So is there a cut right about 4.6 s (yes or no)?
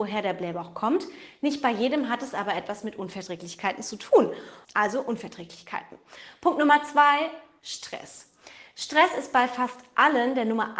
yes